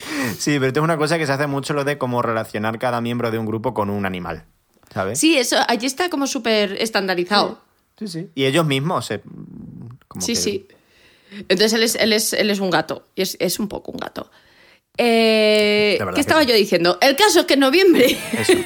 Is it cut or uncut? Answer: uncut